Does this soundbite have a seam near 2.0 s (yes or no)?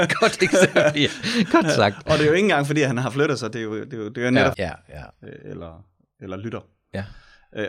no